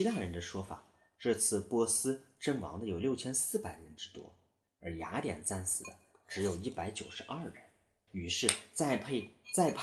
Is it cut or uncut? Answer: cut